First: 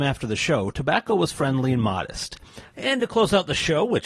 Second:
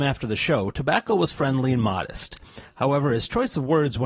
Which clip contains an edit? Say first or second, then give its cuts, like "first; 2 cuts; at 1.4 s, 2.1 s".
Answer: first; 1 cut; at 2.7 s